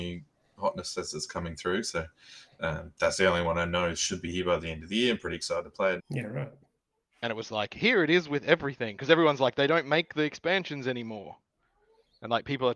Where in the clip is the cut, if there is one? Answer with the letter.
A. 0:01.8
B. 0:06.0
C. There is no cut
B